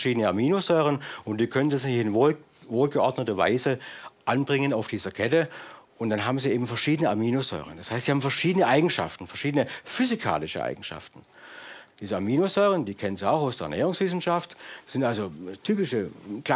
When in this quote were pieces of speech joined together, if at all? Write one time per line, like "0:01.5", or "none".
0:11.9